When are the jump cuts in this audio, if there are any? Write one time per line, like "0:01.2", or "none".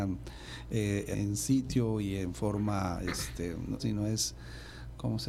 0:01.1
0:03.8